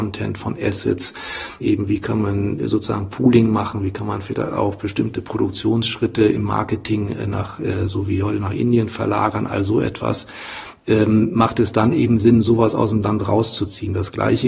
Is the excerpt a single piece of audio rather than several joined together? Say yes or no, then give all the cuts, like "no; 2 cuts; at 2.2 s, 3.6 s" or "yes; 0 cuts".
no; 1 cut; at 1.6 s